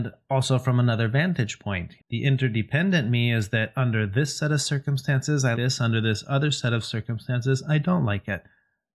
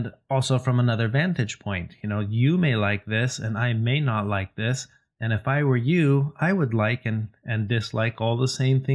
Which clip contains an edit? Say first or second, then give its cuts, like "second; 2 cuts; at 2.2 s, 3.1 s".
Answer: first; 2 cuts; at 2.0 s, 5.5 s